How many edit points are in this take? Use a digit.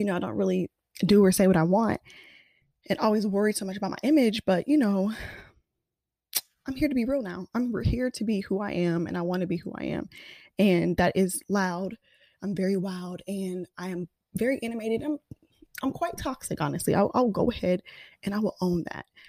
0